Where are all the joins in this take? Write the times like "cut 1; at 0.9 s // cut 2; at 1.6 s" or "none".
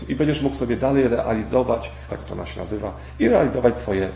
cut 1; at 2.1 s